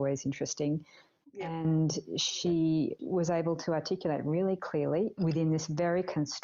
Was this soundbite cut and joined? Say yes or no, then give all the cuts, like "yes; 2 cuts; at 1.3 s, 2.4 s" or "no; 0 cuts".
yes; 2 cuts; at 3.0 s, 5.2 s